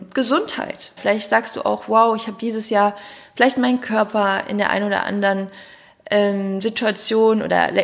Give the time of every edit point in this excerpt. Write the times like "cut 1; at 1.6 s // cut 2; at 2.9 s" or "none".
cut 1; at 1.0 s